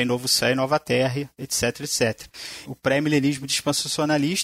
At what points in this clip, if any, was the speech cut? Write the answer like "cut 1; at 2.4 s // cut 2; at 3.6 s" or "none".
cut 1; at 2.7 s